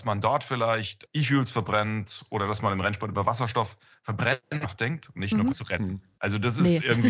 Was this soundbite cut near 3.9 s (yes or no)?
no